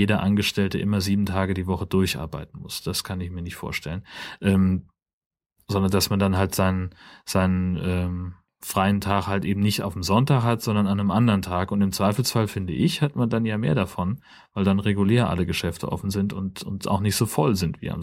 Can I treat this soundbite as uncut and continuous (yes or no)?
yes